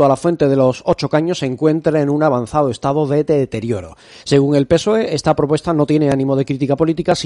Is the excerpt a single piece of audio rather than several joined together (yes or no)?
no